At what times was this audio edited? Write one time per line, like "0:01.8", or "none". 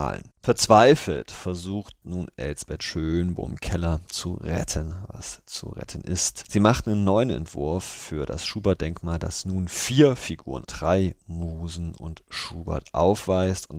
0:10.6